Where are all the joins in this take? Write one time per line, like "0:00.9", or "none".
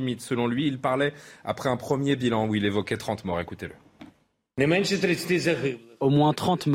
none